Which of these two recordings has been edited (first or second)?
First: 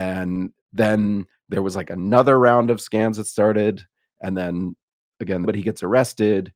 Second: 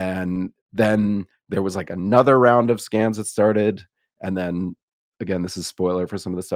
first